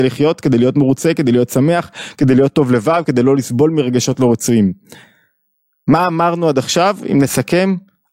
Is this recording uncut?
no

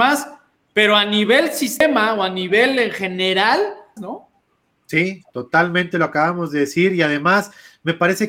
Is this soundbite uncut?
no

